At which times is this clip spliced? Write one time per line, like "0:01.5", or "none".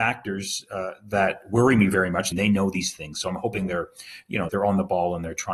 0:02.3
0:04.5